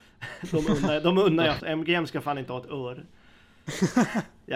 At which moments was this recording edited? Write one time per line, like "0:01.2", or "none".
0:01.6